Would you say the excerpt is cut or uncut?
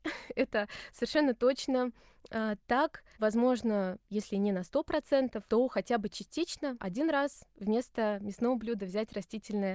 cut